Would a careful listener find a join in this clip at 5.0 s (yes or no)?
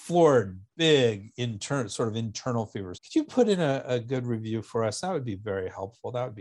no